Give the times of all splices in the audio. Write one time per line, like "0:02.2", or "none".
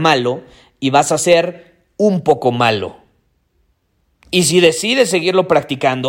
none